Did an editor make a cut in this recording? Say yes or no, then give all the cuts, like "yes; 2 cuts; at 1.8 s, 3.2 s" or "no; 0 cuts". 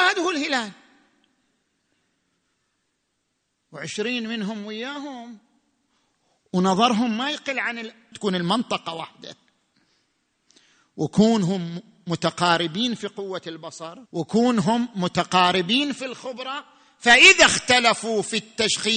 yes; 2 cuts; at 8.1 s, 14.1 s